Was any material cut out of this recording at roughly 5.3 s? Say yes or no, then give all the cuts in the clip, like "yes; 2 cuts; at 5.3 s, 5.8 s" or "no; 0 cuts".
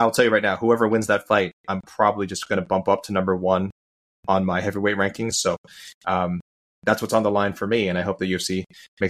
yes; 1 cut; at 5.3 s